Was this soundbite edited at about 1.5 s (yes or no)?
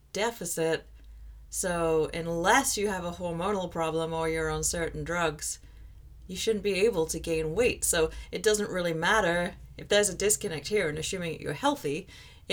no